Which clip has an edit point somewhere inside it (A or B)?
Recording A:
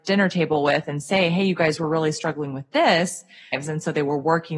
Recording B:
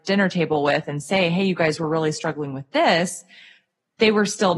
A